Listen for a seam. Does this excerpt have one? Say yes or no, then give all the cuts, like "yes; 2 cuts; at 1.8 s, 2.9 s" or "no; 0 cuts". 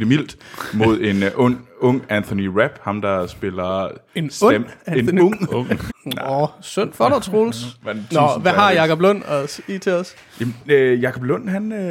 yes; 1 cut; at 5.9 s